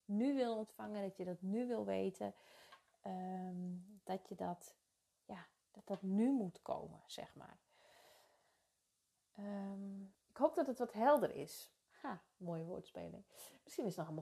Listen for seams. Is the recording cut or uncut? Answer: cut